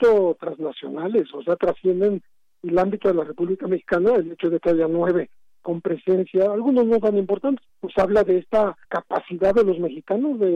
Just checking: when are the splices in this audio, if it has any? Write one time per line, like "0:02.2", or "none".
0:07.7
0:08.8